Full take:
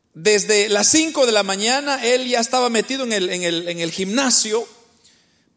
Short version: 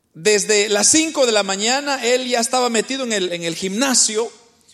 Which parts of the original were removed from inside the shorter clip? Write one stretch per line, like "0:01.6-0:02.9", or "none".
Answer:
0:03.3-0:03.6